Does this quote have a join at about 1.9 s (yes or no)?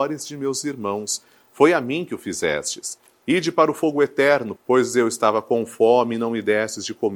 no